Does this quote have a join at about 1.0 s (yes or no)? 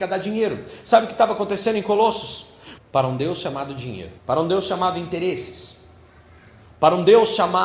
no